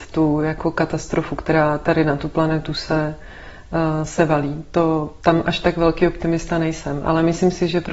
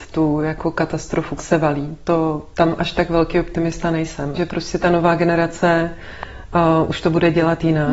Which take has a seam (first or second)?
second